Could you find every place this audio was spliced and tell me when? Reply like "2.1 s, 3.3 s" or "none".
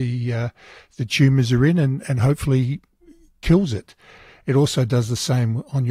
none